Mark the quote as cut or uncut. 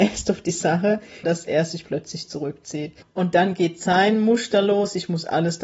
cut